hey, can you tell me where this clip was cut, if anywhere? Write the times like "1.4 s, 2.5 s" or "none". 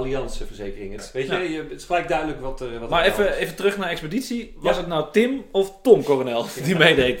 1.0 s